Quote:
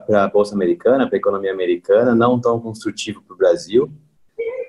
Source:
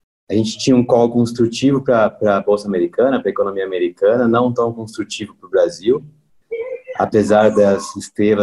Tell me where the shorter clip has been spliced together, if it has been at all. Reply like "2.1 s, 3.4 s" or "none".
none